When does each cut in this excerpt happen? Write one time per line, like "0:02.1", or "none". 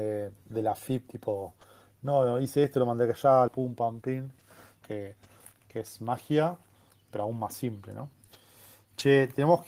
0:03.5
0:04.8